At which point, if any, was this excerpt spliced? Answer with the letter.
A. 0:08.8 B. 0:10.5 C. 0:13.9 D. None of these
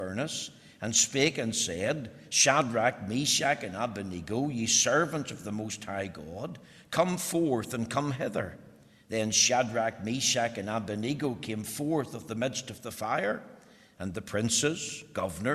D